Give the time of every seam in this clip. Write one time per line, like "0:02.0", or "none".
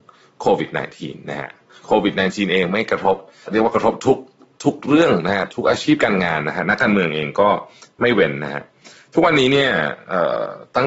0:03.5